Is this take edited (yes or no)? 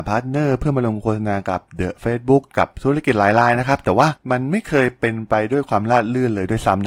no